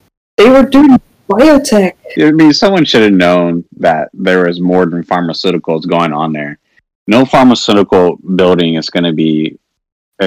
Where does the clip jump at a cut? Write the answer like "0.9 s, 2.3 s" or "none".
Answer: 2.2 s